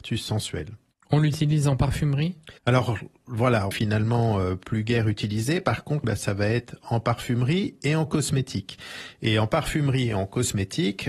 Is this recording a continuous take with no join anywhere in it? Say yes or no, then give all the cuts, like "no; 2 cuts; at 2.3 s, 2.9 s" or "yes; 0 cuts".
no; 3 cuts; at 2.6 s, 3.7 s, 6.0 s